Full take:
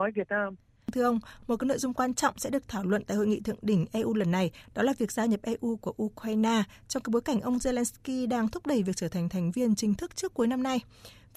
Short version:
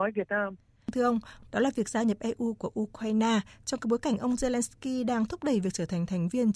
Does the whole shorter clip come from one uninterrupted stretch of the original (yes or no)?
no